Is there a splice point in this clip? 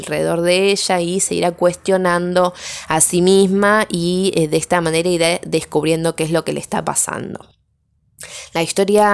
no; 0 cuts

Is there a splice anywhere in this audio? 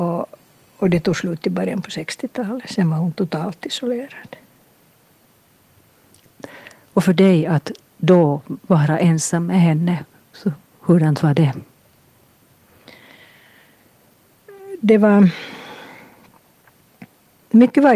no; 0 cuts

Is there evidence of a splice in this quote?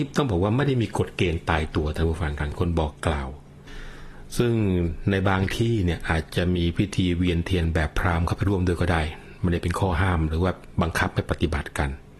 no; 0 cuts

